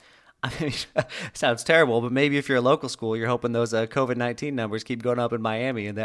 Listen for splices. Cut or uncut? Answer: uncut